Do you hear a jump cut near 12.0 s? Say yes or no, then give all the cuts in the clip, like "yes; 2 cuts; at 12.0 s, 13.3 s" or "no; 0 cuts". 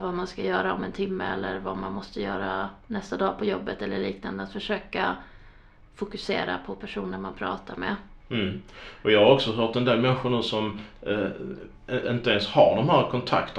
yes; 1 cut; at 12.0 s